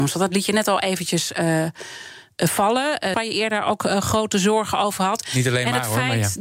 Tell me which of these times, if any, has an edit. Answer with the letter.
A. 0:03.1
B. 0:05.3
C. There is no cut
A